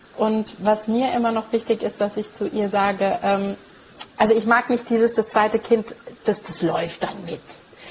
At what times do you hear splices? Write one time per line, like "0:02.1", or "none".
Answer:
0:04.1